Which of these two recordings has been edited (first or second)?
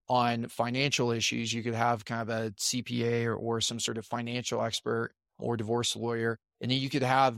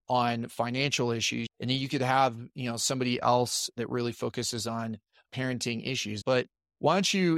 second